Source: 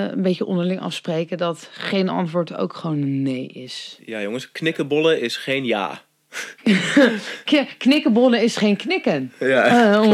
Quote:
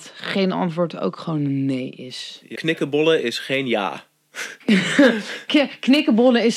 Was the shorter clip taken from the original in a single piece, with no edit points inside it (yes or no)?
no